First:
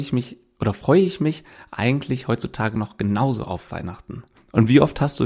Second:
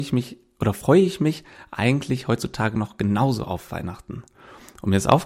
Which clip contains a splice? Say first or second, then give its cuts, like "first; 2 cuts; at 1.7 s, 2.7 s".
first; 1 cut; at 4.4 s